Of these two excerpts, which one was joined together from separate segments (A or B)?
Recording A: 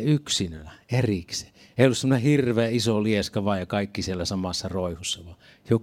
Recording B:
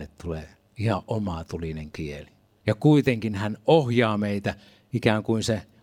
B